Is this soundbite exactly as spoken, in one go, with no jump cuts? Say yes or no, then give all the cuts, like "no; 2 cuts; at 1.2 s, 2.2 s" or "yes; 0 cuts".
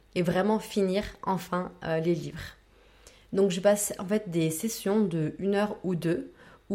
yes; 0 cuts